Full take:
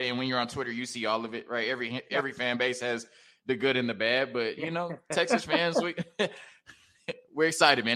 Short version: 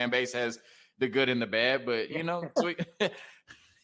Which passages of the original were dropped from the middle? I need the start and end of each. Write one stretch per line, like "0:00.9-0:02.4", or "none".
0:05.0-0:05.7